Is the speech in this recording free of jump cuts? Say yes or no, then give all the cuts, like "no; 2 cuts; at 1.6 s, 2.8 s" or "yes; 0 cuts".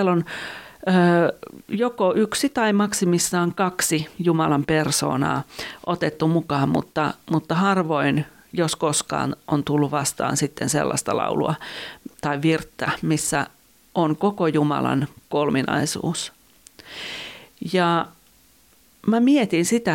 yes; 0 cuts